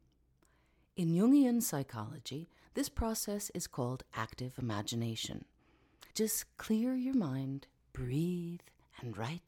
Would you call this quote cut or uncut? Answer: cut